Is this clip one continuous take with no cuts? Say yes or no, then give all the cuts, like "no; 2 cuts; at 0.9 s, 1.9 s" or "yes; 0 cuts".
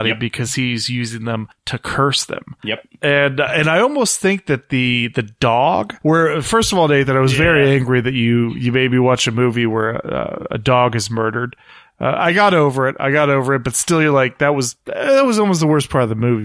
yes; 0 cuts